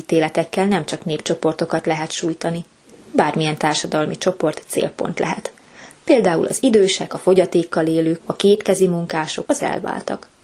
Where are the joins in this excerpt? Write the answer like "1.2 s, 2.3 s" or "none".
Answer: 7.1 s, 8.2 s, 9.4 s